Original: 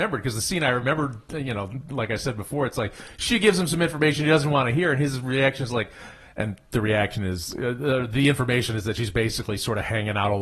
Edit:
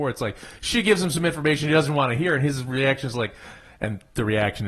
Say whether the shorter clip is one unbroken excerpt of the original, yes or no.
yes